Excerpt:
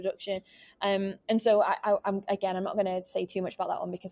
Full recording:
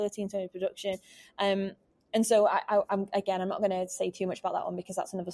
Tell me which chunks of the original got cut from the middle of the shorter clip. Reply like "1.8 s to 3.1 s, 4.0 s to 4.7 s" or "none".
1.8 s to 2.1 s